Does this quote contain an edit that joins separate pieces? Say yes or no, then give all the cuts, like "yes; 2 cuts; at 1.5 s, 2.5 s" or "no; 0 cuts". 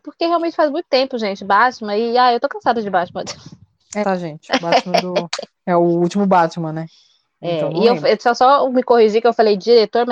yes; 1 cut; at 4.0 s